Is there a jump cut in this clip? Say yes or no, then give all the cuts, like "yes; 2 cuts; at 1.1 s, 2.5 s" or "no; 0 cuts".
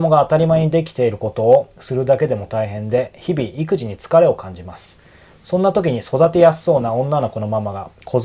no; 0 cuts